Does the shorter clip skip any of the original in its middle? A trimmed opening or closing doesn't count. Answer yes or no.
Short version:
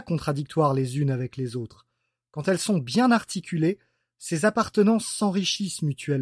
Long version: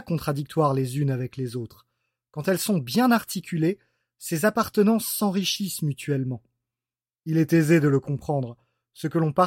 no